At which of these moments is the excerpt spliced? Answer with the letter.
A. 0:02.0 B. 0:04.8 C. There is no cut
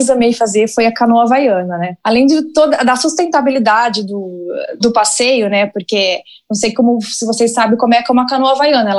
B